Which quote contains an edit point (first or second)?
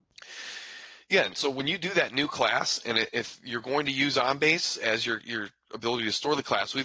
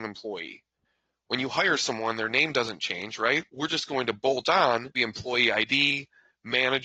second